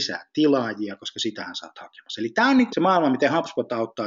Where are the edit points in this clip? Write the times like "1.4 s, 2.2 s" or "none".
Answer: 2.7 s